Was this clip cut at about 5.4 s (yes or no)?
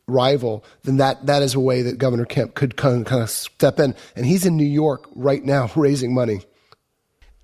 no